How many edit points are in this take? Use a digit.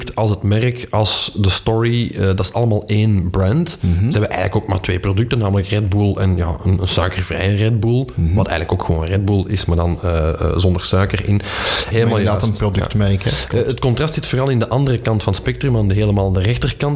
1